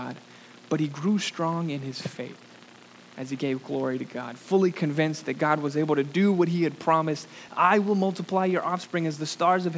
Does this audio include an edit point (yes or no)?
yes